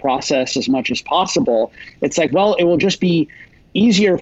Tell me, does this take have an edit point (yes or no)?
no